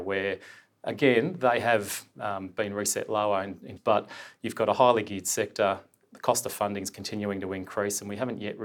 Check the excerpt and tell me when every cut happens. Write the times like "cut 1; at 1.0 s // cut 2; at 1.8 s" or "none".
cut 1; at 3.8 s